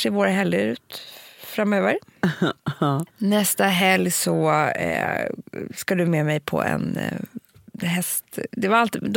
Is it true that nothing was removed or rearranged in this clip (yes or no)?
yes